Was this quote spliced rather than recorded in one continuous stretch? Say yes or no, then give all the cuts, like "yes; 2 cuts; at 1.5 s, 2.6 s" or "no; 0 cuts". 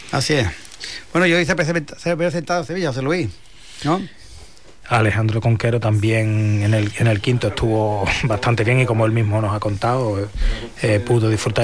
yes; 1 cut; at 4.8 s